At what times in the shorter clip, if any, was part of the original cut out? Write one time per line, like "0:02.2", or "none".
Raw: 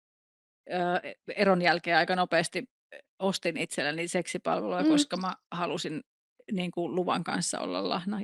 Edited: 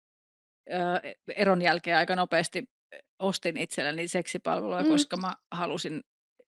none